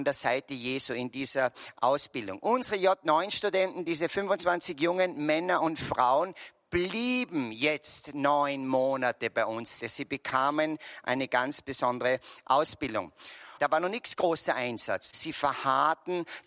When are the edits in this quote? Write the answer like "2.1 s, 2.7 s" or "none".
9.8 s, 13.6 s, 15.1 s